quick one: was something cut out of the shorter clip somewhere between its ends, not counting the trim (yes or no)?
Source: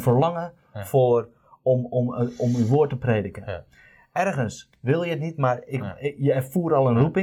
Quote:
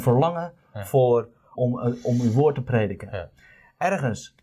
yes